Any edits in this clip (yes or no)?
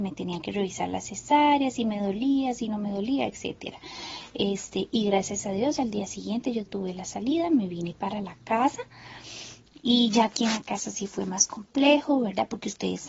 no